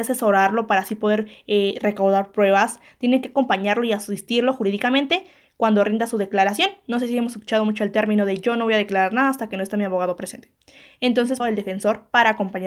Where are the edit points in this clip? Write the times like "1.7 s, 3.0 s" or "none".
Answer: 11.4 s